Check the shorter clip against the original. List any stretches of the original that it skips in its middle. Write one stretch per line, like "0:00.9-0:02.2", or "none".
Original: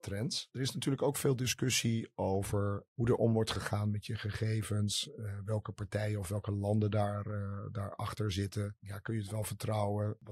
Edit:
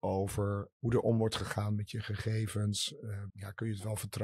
0:05.5-0:08.8